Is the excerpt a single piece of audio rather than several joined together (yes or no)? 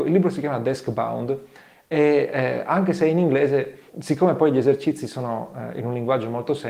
no